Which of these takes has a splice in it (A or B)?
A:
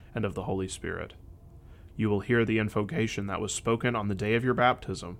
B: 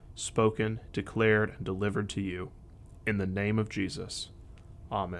A